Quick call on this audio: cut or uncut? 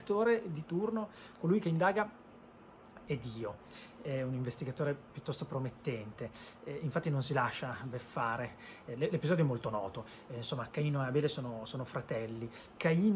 uncut